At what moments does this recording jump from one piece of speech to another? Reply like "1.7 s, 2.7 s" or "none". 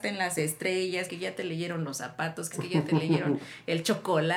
1.1 s, 2.5 s